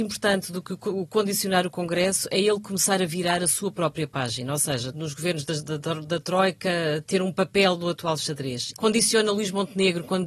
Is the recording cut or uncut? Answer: cut